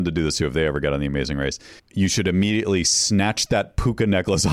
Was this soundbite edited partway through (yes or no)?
yes